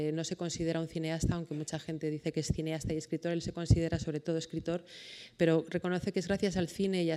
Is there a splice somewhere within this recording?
no; 0 cuts

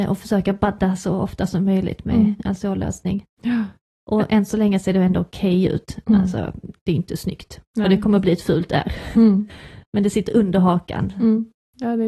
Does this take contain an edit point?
no; 0 cuts

